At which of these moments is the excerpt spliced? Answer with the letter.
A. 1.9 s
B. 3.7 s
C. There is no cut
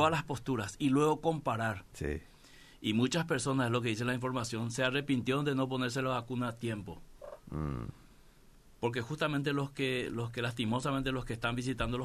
A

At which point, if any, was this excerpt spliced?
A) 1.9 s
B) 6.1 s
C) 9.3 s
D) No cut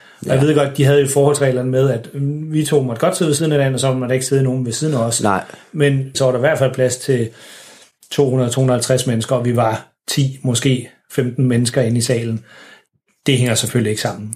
B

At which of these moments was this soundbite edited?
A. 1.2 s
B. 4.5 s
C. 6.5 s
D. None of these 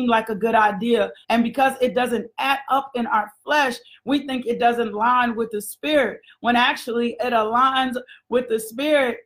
A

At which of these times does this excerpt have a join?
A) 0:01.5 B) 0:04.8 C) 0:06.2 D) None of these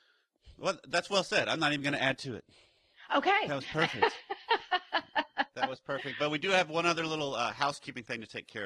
D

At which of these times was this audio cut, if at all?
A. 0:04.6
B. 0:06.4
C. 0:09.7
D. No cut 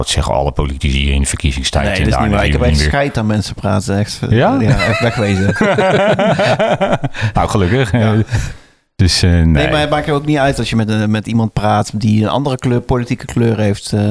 D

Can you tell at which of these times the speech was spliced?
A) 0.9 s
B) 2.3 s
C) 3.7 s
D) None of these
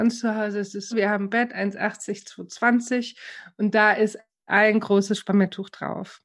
A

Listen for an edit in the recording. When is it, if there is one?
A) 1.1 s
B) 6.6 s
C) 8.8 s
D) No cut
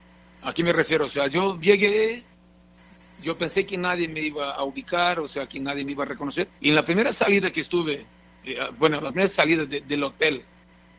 B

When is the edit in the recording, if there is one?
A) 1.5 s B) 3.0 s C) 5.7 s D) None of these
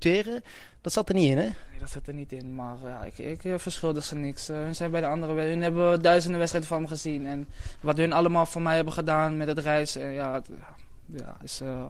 D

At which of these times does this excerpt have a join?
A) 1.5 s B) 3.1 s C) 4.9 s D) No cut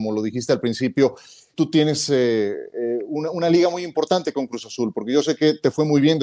A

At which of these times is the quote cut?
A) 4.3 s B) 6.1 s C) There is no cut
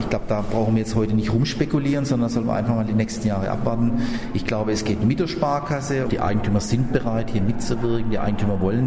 B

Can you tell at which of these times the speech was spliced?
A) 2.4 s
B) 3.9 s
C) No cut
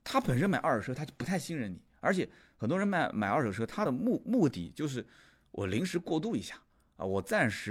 C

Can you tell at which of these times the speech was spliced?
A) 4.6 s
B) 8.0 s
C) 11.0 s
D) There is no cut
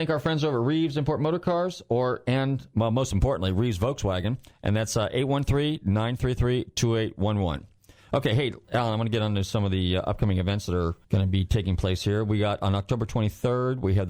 C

